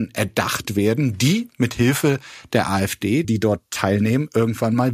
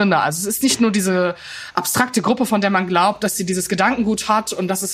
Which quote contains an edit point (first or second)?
first